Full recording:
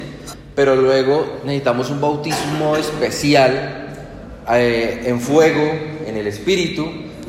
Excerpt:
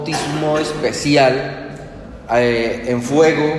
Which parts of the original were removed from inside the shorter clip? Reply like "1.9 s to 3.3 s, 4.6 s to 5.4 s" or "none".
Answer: none